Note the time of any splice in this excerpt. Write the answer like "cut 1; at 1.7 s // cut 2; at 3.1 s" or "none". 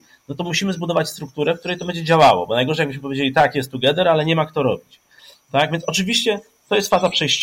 none